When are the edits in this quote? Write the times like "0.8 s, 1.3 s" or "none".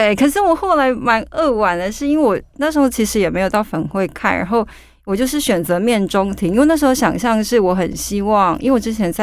none